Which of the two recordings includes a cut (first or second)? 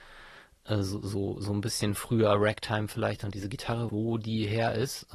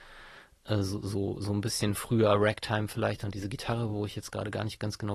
first